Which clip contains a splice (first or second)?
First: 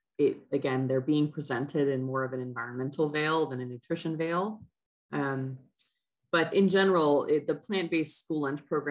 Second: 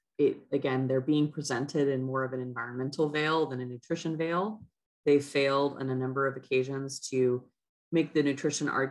first